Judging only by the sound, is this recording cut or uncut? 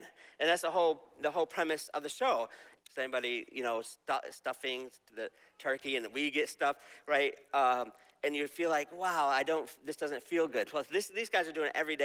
cut